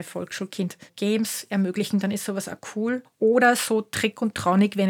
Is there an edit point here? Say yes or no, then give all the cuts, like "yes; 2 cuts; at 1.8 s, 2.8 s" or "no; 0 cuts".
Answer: no; 0 cuts